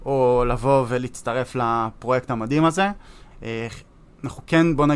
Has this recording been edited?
yes; 1 cut; at 3.3 s

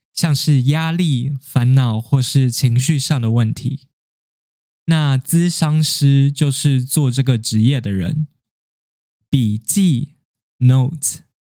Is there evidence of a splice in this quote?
no; 0 cuts

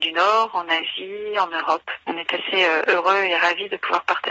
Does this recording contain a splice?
yes; 1 cut; at 2.0 s

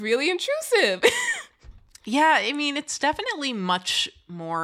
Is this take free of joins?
yes; 0 cuts

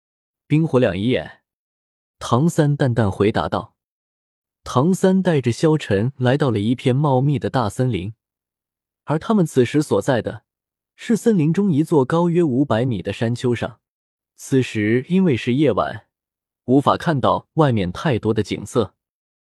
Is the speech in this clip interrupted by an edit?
no; 0 cuts

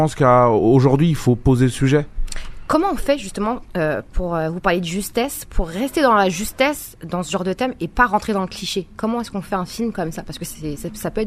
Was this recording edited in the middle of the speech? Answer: no; 0 cuts

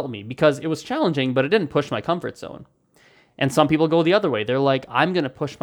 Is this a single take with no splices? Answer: yes; 0 cuts

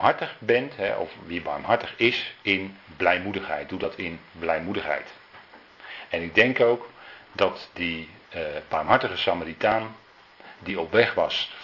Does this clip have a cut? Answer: no; 0 cuts

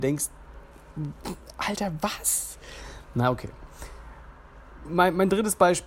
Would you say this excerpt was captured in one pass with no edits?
yes; 0 cuts

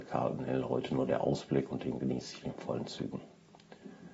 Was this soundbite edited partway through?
yes; 1 cut; at 2.4 s

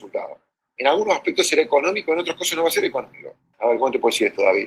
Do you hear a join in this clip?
yes; 1 cut; at 3.5 s

